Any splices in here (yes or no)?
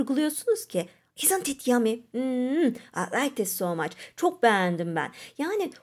no